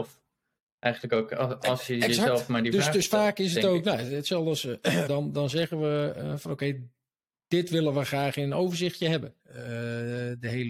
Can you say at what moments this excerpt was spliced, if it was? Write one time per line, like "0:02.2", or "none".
0:05.1
0:09.4